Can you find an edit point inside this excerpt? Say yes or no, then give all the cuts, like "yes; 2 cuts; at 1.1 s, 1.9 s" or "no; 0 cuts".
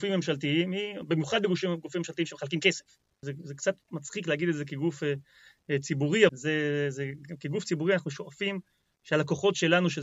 yes; 2 cuts; at 3.2 s, 6.3 s